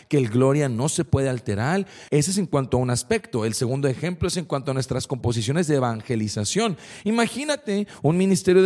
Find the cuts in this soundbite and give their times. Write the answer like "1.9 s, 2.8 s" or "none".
2.1 s